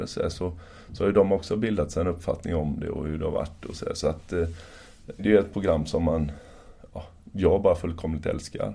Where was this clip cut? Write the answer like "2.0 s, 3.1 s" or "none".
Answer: 5.2 s